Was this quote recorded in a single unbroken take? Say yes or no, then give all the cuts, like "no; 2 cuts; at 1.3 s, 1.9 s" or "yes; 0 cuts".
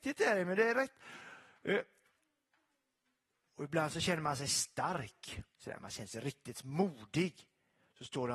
yes; 0 cuts